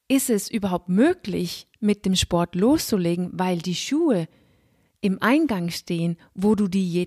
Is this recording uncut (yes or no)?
yes